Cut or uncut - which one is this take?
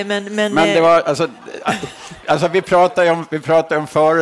cut